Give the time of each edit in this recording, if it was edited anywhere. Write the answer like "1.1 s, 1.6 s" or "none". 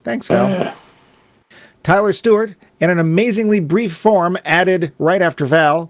none